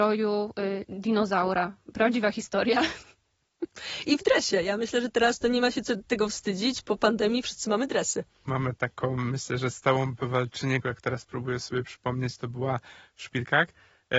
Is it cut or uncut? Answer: cut